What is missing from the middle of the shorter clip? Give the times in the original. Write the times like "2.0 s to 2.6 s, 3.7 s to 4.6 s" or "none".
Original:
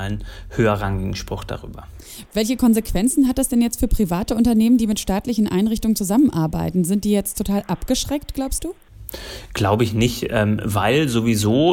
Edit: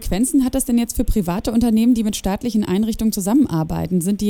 none